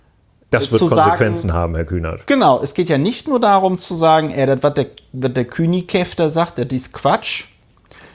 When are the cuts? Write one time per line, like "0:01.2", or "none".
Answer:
none